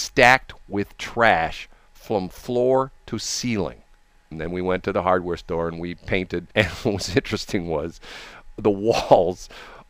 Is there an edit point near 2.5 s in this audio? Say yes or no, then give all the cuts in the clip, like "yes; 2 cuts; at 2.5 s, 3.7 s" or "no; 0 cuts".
no; 2 cuts; at 4.3 s, 6.5 s